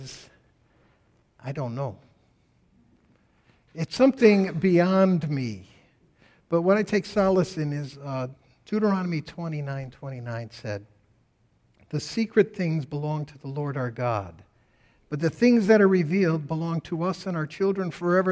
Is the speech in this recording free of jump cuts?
yes; 0 cuts

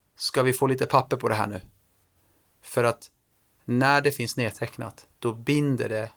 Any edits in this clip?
yes; 1 cut; at 5.1 s

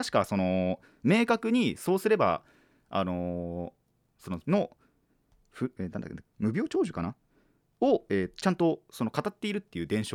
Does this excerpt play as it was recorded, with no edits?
no; 2 cuts; at 4.4 s, 6.2 s

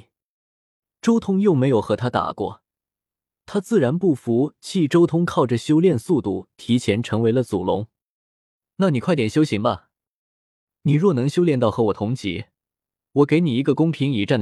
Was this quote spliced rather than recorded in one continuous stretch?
no; 0 cuts

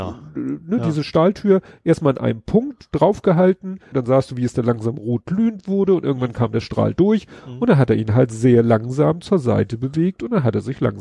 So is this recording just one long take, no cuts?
no; 1 cut; at 3.9 s

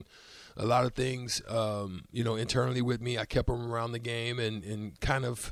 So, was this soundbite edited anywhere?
no; 0 cuts

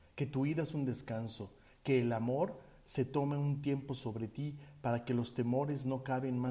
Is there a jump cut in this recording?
no; 0 cuts

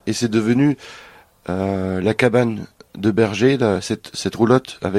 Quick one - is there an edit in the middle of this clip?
no; 0 cuts

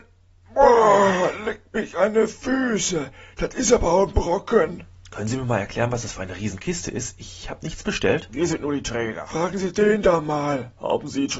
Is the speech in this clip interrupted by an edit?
no; 0 cuts

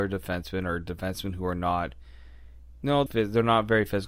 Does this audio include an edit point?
yes; 1 cut; at 3.1 s

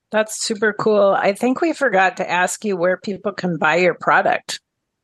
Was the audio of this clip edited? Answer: no; 0 cuts

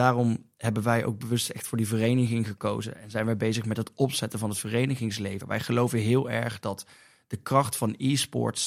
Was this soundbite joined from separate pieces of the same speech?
yes; 1 cut; at 5.4 s

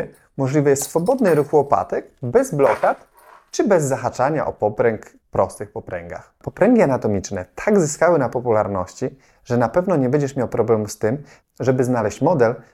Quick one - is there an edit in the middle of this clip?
yes; 1 cut; at 5.2 s

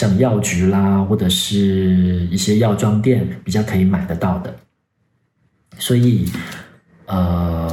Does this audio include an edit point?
no; 0 cuts

